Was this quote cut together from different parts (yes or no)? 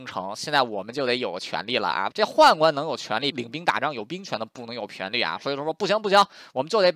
yes